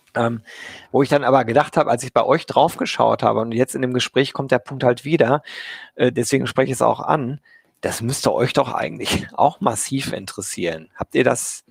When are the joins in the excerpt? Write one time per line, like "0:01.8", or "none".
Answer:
none